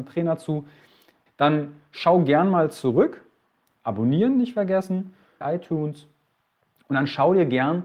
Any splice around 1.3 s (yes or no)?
yes